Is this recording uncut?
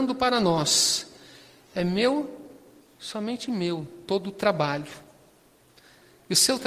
yes; 0 cuts

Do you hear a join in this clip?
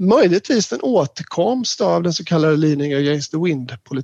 no; 0 cuts

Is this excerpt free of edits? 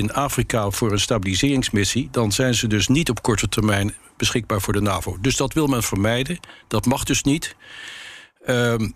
yes; 0 cuts

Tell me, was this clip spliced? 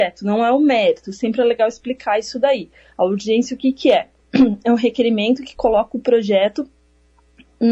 no; 0 cuts

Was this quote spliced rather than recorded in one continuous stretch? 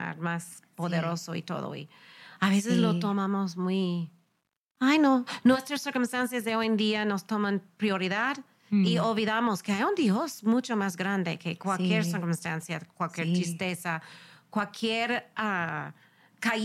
no; 0 cuts

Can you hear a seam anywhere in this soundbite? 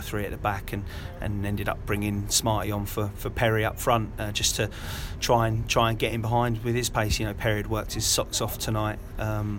no; 0 cuts

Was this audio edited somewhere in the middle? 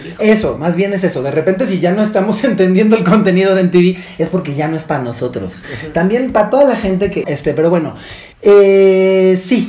yes; 2 cuts; at 7.2 s, 8.3 s

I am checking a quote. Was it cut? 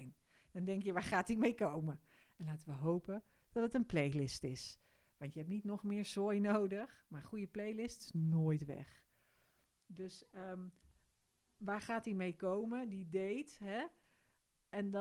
no; 0 cuts

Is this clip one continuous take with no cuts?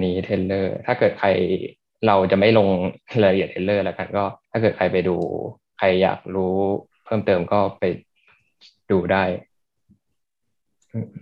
no; 1 cut; at 4.4 s

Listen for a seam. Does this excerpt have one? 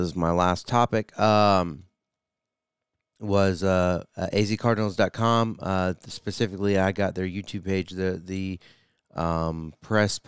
no; 0 cuts

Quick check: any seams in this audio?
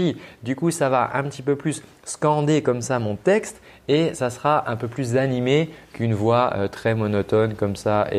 no; 0 cuts

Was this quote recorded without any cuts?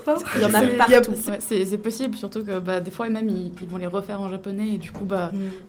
no; 2 cuts; at 1.3 s, 3.6 s

